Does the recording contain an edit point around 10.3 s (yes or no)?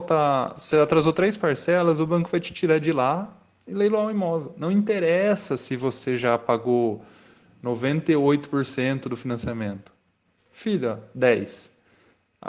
yes